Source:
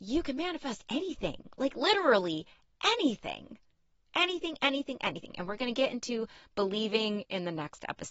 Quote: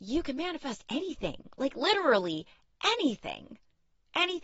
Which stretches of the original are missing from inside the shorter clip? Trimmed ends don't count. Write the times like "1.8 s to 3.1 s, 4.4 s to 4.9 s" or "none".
none